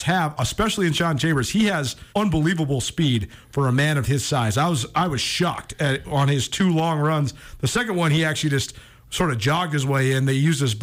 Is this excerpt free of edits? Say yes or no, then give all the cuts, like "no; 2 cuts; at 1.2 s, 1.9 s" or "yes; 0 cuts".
no; 1 cut; at 2.1 s